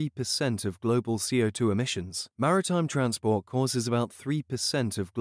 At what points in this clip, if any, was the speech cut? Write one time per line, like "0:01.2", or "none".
0:02.3

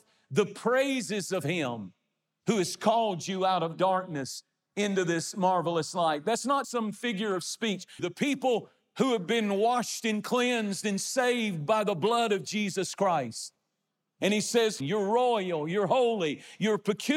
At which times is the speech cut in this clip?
0:06.6
0:08.0
0:14.8

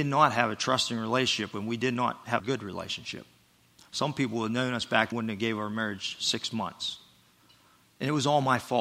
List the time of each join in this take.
0:02.4
0:05.1

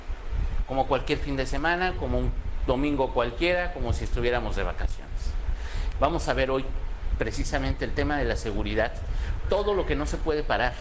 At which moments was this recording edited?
0:05.9
0:09.4

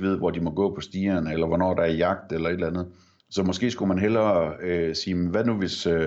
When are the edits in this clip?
0:03.2

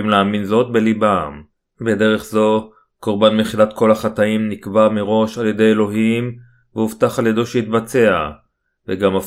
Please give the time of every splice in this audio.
none

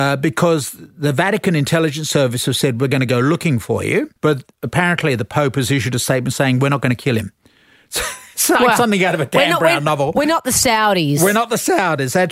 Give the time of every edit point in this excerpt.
0:04.2

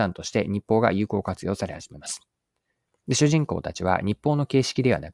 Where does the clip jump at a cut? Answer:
0:02.9

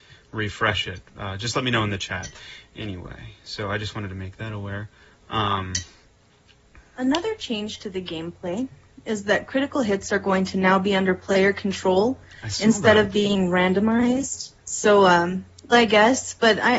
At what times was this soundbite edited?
0:14.6
0:15.7

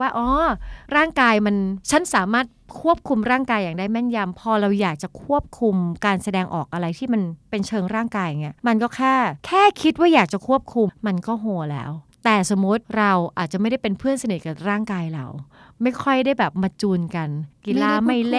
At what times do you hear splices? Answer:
0:08.6
0:10.9

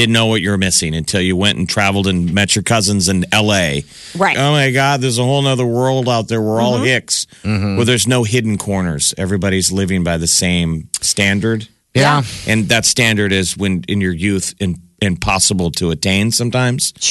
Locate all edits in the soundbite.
0:04.3

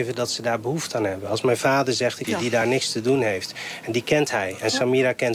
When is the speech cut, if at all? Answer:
0:02.2

